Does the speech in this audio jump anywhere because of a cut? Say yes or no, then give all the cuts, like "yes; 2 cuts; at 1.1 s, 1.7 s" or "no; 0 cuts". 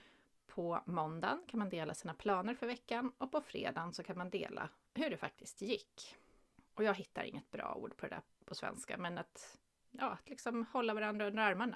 yes; 1 cut; at 6.7 s